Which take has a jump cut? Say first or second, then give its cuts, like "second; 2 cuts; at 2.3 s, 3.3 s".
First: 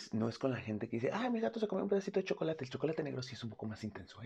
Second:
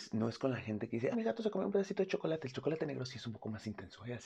second; 1 cut; at 1.1 s